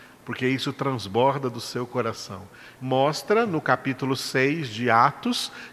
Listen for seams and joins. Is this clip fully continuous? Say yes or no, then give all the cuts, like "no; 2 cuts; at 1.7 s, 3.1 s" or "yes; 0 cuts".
no; 1 cut; at 2.8 s